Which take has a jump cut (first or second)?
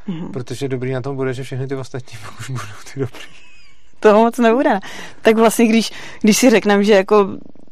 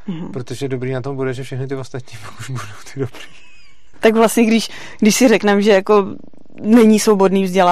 second